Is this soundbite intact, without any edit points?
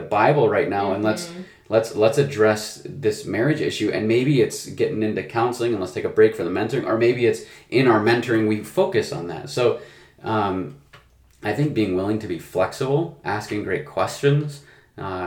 yes; 0 cuts

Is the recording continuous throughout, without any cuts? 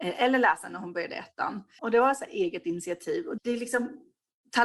no; 2 cuts; at 1.8 s, 3.4 s

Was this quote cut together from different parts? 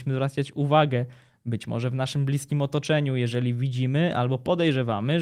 no; 0 cuts

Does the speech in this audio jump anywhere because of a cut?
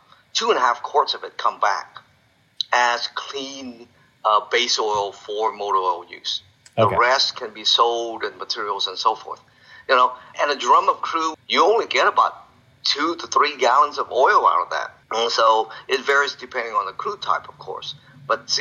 yes; 3 cuts; at 10.3 s, 11.3 s, 15.0 s

